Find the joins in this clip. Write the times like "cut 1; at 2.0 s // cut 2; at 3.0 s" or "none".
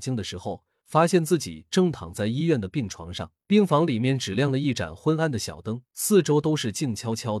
cut 1; at 3.4 s // cut 2; at 5.9 s

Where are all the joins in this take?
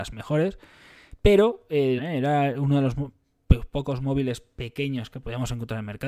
cut 1; at 2.0 s

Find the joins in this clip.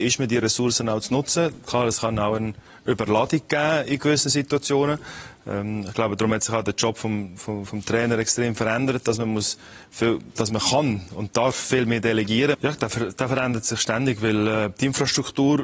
cut 1; at 12.5 s

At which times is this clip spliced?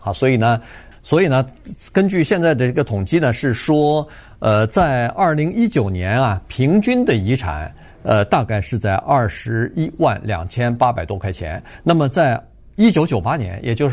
cut 1; at 0.9 s

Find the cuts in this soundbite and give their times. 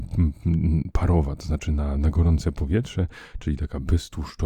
none

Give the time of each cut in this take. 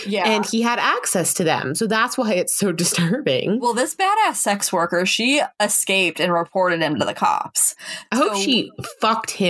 none

